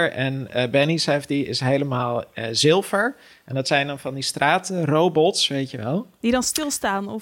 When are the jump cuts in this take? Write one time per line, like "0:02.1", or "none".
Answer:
none